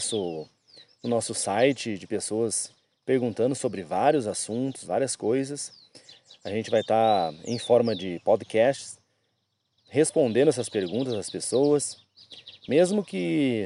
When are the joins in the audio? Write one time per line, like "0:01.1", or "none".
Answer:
0:04.8